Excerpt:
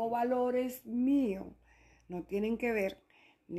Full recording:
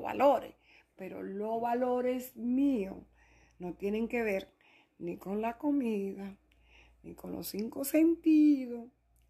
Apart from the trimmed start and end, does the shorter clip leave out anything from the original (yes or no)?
no